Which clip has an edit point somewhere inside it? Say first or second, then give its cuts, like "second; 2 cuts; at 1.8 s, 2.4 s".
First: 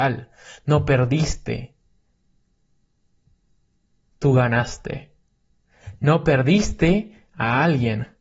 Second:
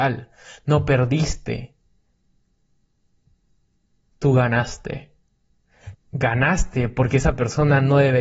second; 1 cut; at 5.9 s